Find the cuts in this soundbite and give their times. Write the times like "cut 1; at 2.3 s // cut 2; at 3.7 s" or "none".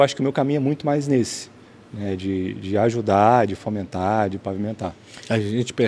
none